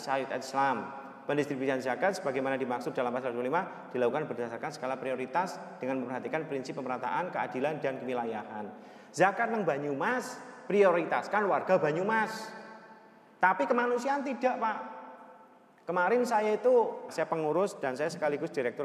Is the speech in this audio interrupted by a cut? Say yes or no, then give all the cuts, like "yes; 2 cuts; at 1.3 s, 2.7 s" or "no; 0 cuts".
yes; 1 cut; at 17.1 s